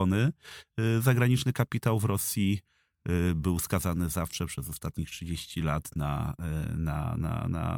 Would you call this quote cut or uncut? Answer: uncut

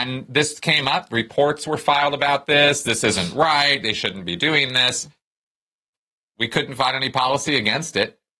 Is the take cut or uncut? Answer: uncut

